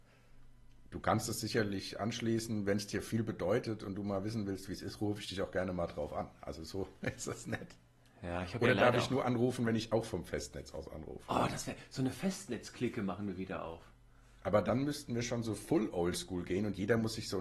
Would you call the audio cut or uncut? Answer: uncut